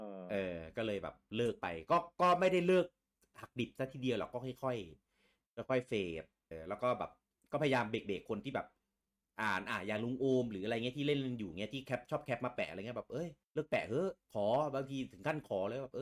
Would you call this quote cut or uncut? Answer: cut